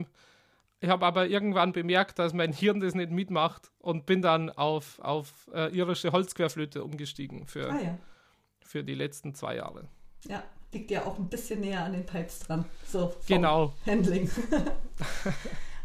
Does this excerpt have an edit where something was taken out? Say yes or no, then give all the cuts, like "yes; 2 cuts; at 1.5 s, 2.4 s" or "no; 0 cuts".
no; 0 cuts